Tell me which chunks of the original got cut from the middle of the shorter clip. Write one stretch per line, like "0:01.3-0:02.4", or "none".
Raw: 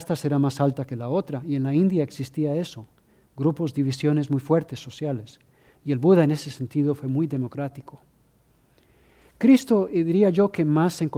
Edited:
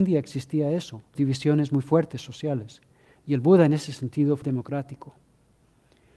0:03.0-0:03.7
0:07.0-0:07.3